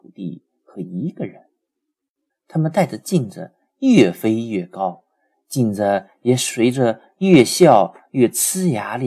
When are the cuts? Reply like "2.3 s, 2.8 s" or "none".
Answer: 2.3 s